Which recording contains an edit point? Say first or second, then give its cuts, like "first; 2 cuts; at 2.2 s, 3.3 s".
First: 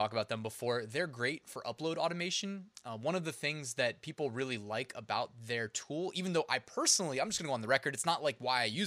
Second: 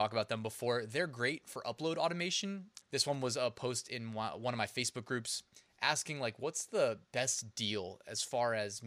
second; 2 cuts; at 2.8 s, 7.1 s